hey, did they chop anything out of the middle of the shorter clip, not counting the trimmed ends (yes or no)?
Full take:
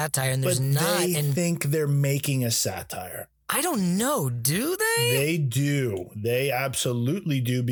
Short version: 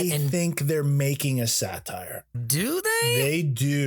yes